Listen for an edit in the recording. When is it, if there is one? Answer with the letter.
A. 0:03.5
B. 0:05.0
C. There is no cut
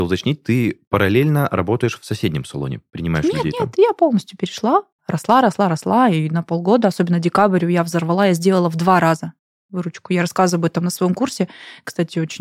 B